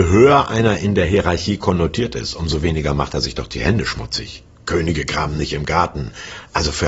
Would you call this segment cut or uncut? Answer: uncut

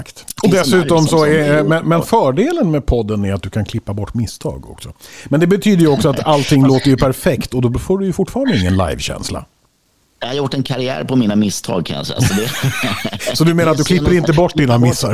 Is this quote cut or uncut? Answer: uncut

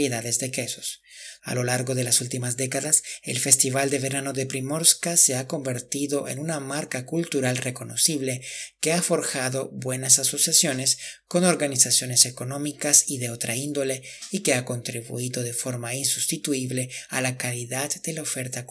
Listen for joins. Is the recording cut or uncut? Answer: cut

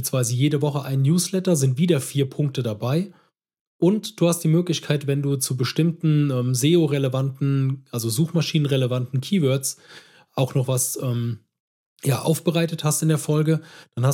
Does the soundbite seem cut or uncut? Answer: uncut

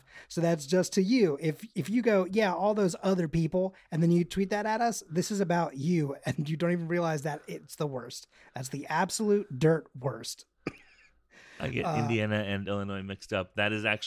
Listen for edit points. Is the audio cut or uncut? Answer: uncut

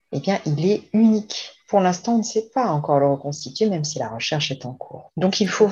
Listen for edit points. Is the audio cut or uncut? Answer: uncut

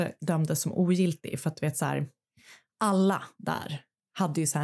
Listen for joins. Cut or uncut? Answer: uncut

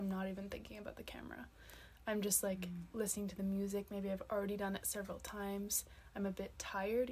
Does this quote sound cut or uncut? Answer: uncut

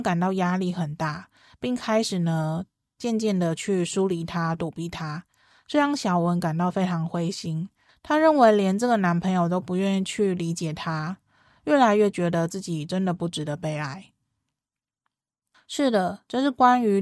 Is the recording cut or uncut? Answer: uncut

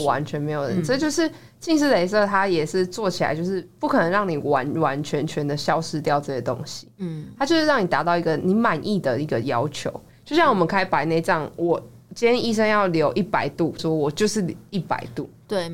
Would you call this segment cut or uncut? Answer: cut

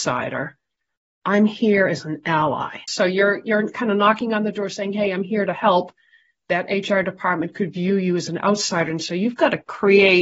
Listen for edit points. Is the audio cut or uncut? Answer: cut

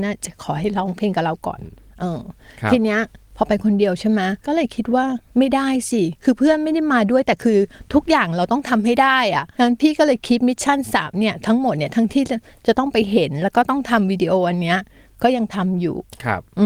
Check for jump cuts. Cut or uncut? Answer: uncut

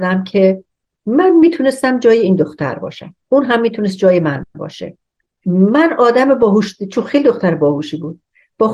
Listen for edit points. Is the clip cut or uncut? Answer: cut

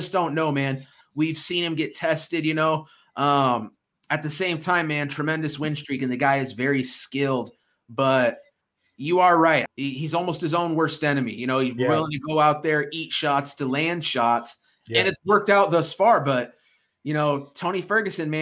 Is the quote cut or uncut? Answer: cut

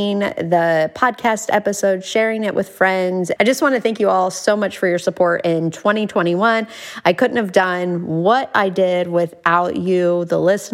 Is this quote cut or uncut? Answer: cut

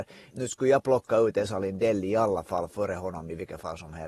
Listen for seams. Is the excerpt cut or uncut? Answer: uncut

